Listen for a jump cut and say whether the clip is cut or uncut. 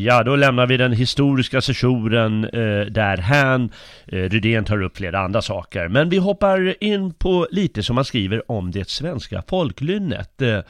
uncut